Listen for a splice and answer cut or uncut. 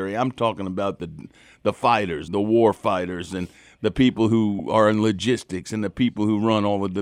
cut